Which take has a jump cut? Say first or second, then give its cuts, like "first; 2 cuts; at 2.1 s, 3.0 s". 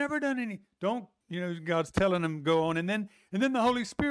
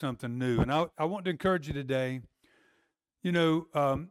first; 1 cut; at 1.2 s